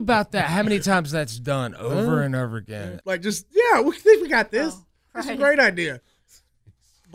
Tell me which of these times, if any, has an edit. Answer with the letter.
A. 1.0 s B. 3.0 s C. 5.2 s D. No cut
B